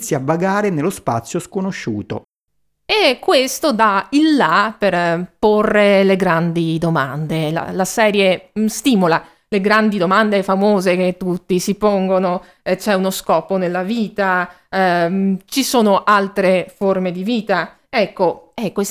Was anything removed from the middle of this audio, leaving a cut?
no; 0 cuts

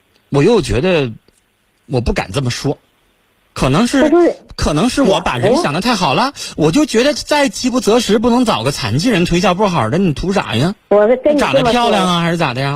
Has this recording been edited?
no; 0 cuts

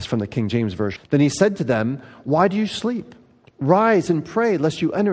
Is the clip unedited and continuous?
no; 1 cut; at 1.0 s

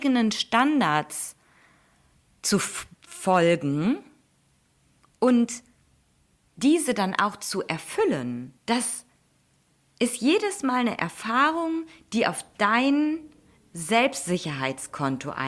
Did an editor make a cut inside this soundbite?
yes; 1 cut; at 8.6 s

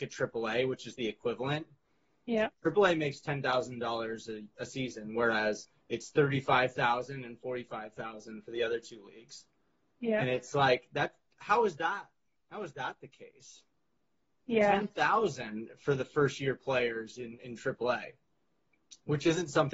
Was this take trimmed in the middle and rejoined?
no; 0 cuts

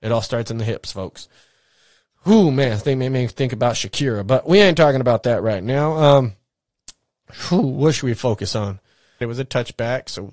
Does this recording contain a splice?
yes; 1 cut; at 9.2 s

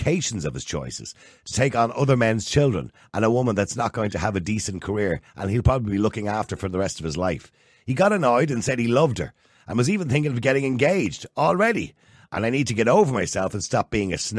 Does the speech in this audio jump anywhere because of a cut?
no; 0 cuts

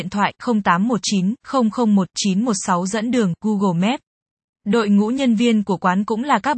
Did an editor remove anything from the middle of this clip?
yes; 1 cut; at 4.5 s

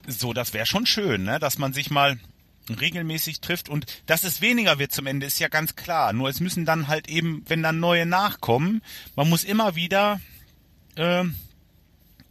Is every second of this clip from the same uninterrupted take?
yes; 0 cuts

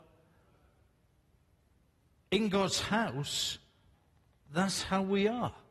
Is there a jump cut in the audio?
no; 0 cuts

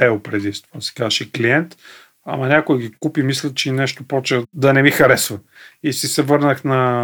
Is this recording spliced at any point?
no; 0 cuts

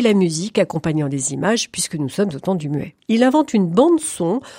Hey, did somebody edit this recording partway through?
yes; 1 cut; at 3.0 s

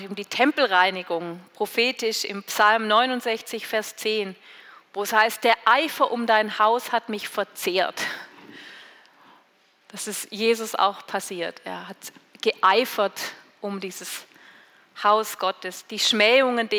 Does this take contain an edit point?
no; 0 cuts

